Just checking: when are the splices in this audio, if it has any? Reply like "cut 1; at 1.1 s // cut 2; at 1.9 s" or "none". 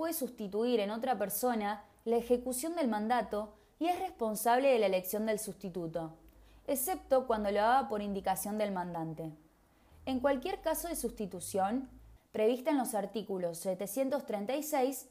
cut 1; at 9.9 s // cut 2; at 12.2 s